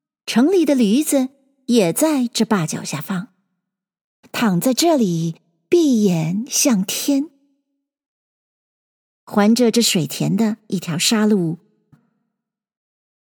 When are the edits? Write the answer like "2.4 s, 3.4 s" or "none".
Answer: 4.2 s, 11.9 s

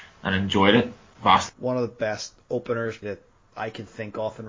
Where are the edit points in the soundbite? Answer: 1.5 s, 3.0 s

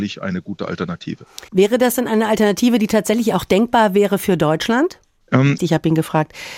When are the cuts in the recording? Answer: 1.5 s, 5.6 s

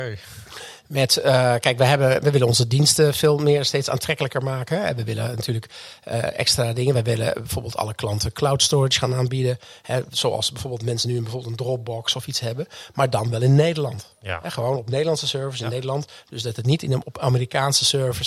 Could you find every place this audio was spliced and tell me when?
none

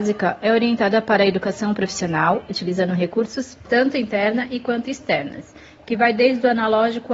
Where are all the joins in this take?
3.6 s

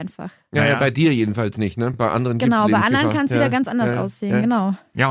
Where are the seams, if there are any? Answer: none

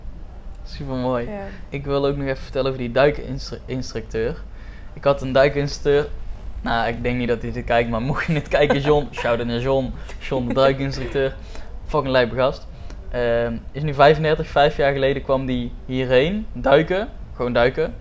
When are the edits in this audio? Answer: 1.7 s

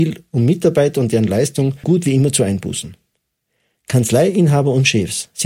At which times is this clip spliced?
1.8 s

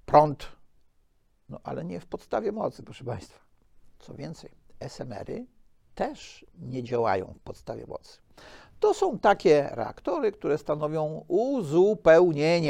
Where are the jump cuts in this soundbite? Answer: none

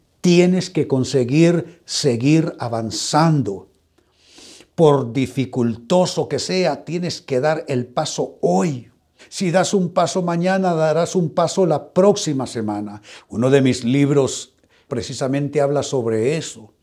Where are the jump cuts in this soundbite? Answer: 9.2 s, 13.2 s, 14.9 s

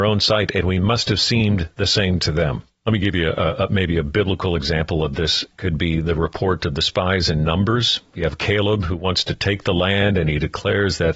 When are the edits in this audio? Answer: 2.8 s

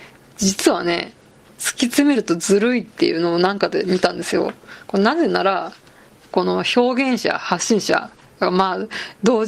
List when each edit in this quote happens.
none

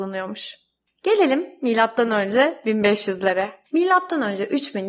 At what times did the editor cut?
3.7 s

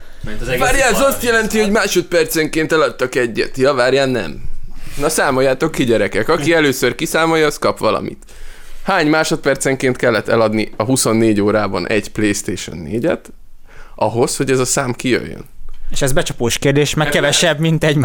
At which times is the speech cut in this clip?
none

